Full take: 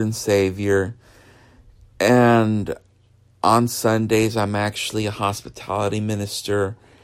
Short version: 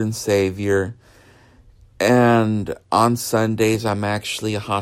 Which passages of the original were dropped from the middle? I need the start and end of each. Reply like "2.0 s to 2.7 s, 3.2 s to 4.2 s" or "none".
2.8 s to 3.4 s